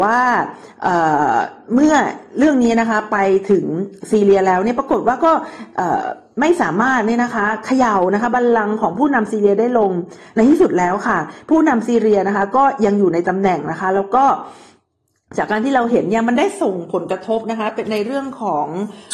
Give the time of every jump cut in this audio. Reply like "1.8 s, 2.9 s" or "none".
none